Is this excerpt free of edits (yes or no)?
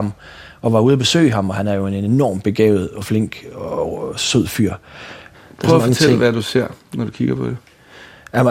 yes